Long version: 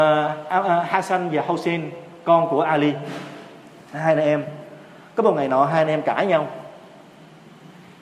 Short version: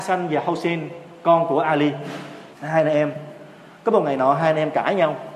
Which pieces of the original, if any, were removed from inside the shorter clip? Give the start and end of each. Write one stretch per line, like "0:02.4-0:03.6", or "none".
0:03.5-0:03.8